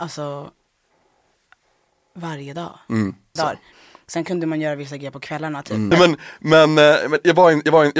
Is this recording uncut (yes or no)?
no